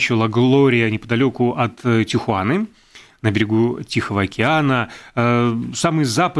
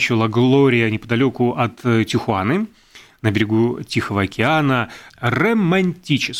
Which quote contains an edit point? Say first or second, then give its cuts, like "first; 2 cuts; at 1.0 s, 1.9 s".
second; 1 cut; at 5.1 s